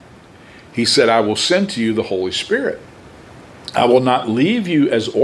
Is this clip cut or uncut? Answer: uncut